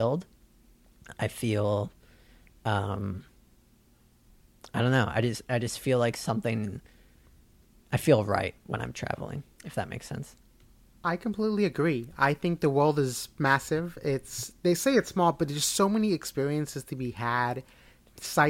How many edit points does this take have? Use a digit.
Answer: 0